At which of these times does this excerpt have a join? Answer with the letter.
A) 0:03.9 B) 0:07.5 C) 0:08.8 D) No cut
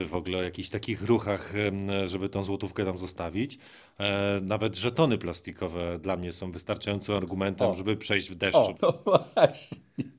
C